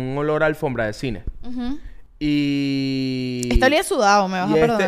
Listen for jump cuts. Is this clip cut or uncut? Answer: uncut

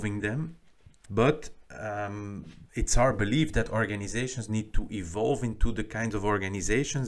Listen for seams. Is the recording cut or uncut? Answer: cut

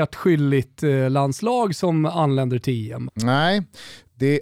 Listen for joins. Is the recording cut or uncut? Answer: cut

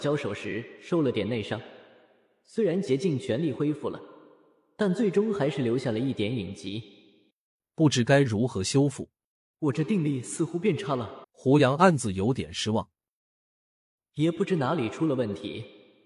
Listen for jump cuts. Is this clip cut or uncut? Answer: cut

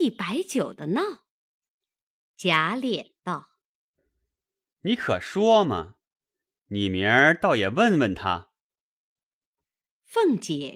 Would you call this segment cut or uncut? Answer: uncut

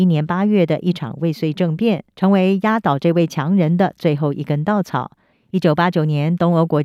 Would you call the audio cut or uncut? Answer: cut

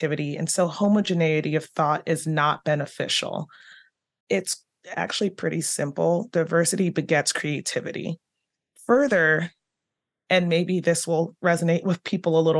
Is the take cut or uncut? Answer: uncut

